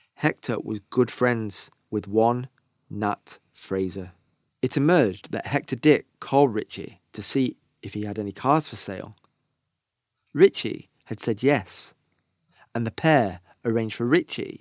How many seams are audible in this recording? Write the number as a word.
zero